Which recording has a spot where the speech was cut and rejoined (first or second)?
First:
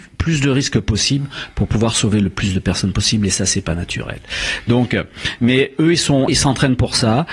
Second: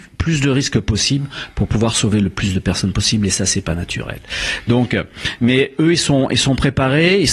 first